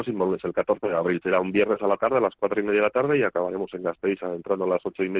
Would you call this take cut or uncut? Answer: cut